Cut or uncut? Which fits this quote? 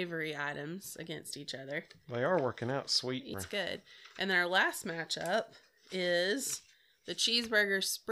cut